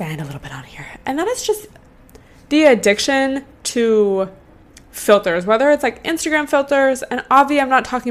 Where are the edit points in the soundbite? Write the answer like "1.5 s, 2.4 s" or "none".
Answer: none